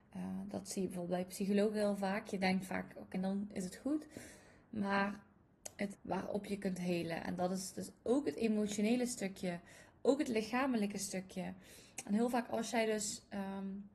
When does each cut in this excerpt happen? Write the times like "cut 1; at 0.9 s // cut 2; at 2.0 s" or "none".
cut 1; at 3.1 s // cut 2; at 5.9 s